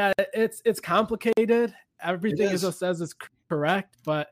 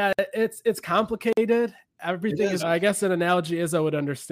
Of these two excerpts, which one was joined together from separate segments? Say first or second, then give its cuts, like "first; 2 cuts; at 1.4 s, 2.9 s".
second; 1 cut; at 2.6 s